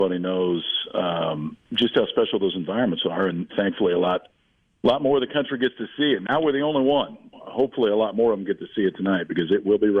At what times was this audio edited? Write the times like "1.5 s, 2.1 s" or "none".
3.5 s, 7.3 s